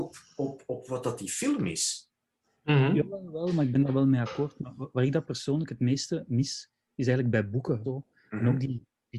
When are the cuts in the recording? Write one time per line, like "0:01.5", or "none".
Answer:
0:07.8